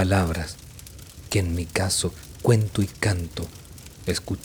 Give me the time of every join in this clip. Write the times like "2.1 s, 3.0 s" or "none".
1.3 s